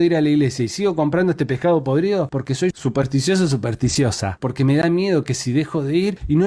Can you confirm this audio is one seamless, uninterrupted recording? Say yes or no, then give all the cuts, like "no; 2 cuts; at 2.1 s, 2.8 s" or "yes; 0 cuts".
yes; 0 cuts